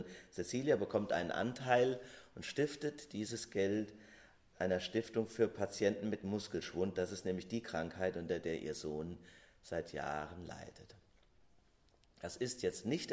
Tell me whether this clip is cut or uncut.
uncut